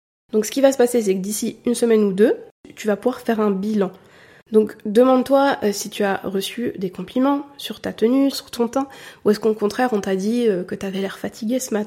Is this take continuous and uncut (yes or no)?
no